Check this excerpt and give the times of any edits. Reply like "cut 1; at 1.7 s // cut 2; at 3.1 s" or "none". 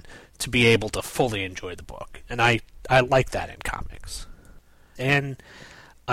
cut 1; at 5.0 s